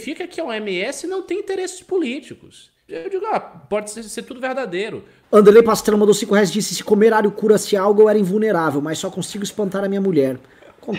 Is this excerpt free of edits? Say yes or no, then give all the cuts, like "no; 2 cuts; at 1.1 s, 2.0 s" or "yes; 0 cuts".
no; 2 cuts; at 2.9 s, 5.2 s